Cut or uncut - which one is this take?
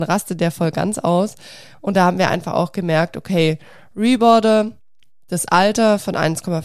uncut